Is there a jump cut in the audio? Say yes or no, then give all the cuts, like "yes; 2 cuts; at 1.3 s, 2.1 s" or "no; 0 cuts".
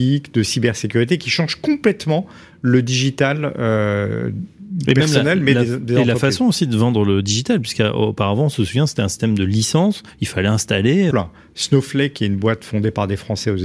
yes; 1 cut; at 11.1 s